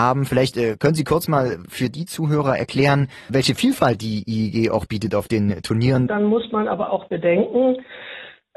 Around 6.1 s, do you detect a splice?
yes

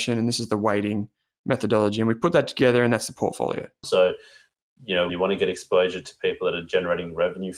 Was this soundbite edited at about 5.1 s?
yes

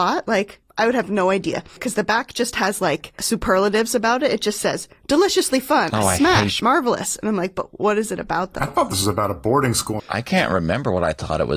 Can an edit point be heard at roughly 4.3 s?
no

